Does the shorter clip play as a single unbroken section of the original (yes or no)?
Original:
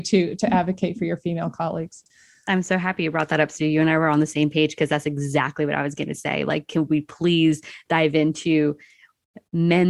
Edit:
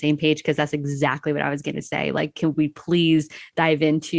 yes